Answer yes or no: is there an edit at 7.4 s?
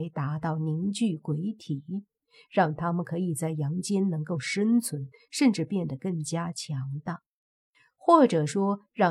no